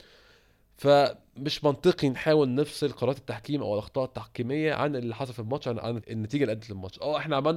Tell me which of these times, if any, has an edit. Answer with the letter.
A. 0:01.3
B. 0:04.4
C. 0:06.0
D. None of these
C